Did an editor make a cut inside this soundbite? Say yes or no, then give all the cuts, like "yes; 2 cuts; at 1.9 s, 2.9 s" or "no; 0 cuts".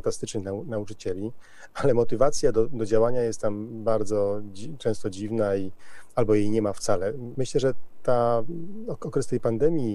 yes; 1 cut; at 7.3 s